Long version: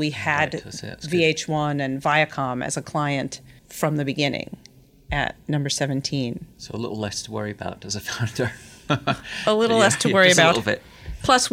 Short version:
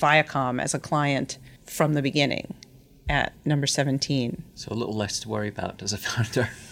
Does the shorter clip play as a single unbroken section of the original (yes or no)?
yes